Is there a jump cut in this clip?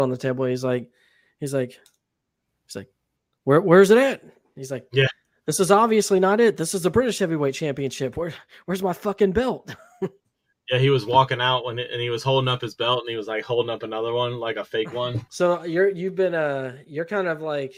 yes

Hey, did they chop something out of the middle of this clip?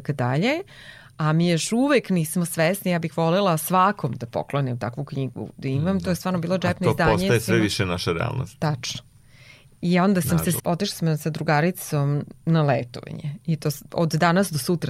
yes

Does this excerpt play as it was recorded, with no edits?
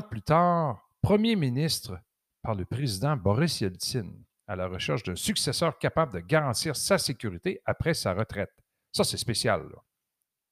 yes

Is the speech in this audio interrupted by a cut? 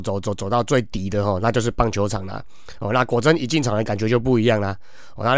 no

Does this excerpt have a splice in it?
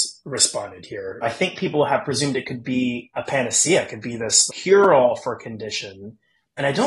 yes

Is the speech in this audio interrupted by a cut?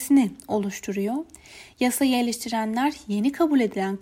no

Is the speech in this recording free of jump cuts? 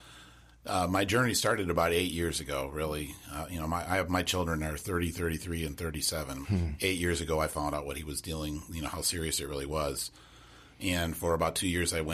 no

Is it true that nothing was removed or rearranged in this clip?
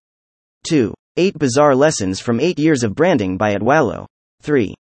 yes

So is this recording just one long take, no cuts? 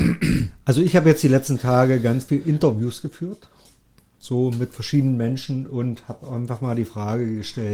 yes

